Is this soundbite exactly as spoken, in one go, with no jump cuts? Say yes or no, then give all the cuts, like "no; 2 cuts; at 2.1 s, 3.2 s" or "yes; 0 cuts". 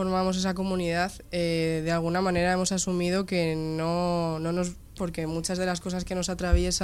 no; 1 cut; at 5.0 s